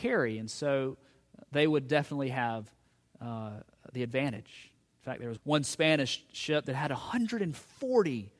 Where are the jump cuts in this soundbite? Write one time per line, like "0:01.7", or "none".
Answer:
0:05.4